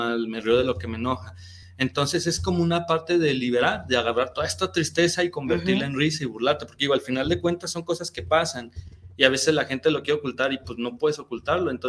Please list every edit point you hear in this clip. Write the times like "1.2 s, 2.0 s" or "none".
none